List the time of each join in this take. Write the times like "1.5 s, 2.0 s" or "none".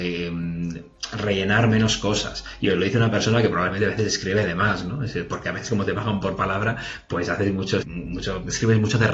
7.8 s